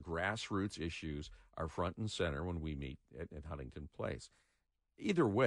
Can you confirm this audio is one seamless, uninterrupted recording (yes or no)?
yes